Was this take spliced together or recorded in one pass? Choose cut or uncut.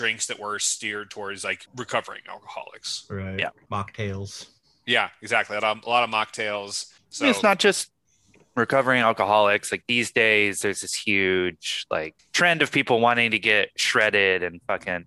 uncut